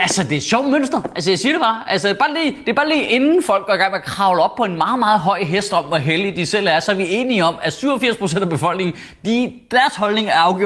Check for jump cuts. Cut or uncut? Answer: uncut